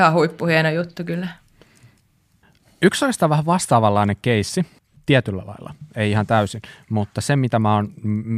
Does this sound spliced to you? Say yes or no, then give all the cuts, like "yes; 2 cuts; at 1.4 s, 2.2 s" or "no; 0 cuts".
no; 0 cuts